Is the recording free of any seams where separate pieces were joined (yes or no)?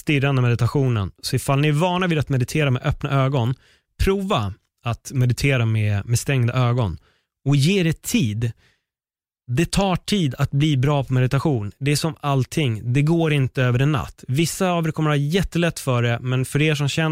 yes